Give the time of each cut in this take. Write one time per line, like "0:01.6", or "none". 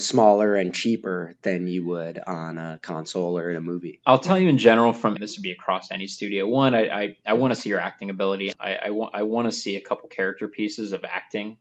0:05.2
0:08.5